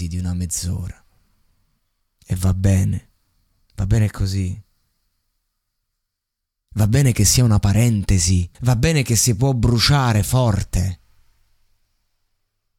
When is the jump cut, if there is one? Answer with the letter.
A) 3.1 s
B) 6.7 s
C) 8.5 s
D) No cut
C